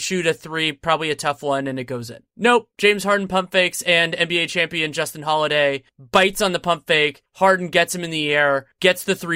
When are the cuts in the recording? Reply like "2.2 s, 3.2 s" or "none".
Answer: none